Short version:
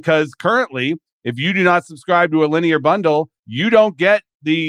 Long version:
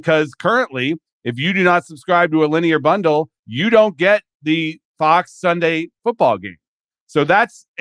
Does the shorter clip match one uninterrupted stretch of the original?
yes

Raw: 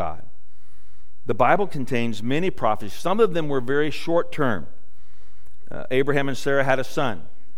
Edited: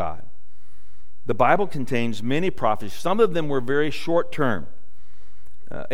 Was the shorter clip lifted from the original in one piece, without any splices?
yes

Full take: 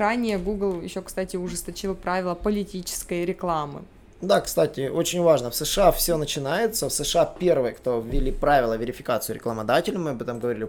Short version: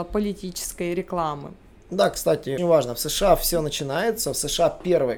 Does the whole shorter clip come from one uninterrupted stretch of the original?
no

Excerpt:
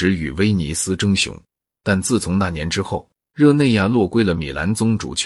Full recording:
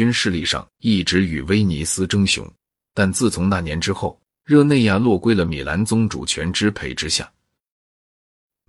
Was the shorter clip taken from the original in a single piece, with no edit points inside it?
yes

